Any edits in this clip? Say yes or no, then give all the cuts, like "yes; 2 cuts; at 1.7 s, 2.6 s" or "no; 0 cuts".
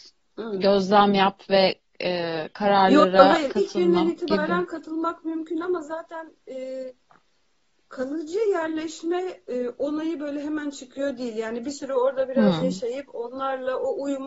no; 0 cuts